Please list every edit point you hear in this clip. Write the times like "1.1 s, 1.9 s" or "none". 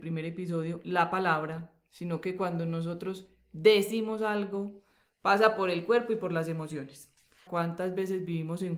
7.5 s